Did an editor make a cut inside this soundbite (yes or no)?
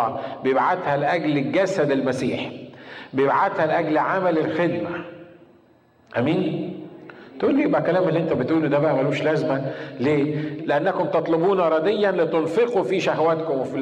yes